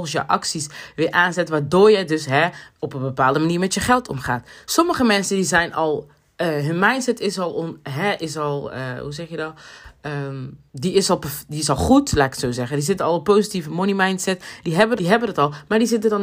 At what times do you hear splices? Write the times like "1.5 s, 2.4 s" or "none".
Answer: 10.7 s, 15.0 s

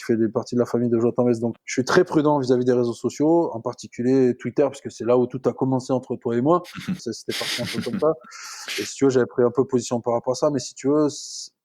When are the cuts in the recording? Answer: 1.6 s, 7.0 s

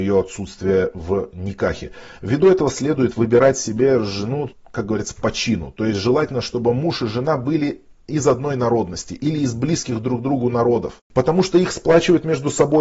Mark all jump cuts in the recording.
11.0 s

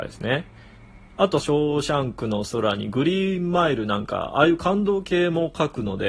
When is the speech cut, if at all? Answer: 1.4 s

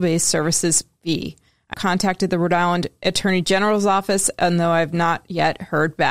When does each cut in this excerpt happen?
1.7 s

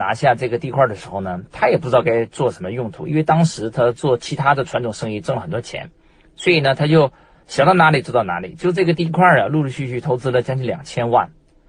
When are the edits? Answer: none

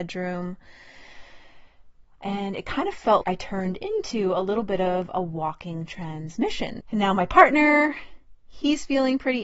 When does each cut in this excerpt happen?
3.2 s, 6.8 s

